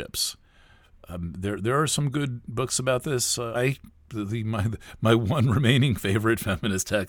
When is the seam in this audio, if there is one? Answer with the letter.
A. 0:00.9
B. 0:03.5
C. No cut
B